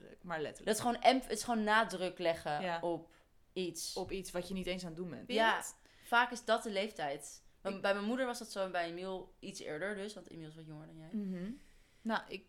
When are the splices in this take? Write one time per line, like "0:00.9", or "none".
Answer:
0:05.3